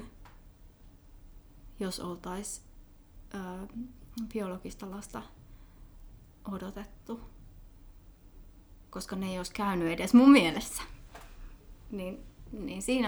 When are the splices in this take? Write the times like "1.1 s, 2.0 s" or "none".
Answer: none